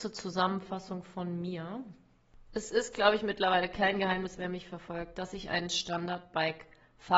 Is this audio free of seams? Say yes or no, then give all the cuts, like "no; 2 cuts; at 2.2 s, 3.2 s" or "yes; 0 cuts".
yes; 0 cuts